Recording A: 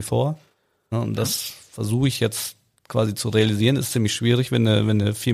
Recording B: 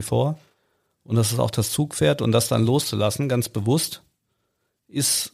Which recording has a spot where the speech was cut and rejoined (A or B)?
A